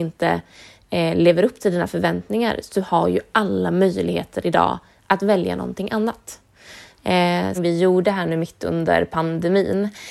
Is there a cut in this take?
yes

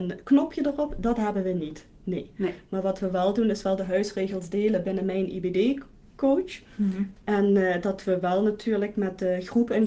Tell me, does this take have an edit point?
no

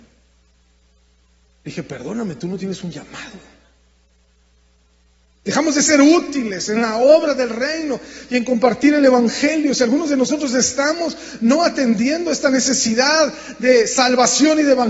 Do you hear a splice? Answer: no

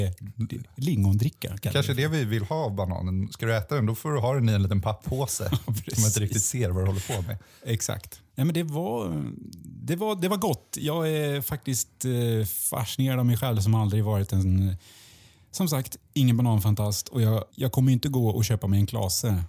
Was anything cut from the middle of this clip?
yes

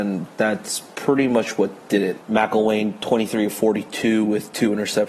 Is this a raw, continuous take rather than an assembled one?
no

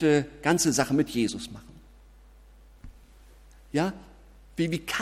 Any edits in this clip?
no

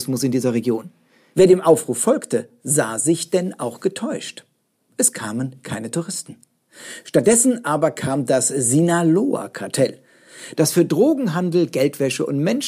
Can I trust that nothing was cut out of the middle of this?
yes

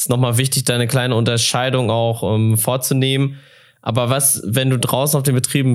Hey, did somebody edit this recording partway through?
no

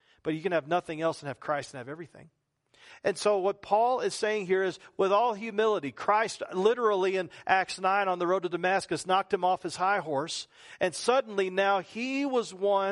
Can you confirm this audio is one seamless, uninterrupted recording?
yes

